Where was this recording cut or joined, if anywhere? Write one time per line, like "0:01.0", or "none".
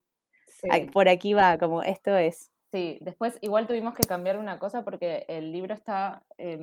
none